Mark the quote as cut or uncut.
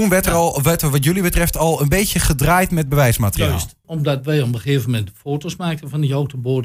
cut